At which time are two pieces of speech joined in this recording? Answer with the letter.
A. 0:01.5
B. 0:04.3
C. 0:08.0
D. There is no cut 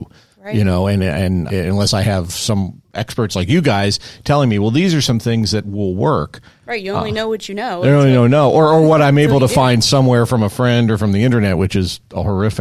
A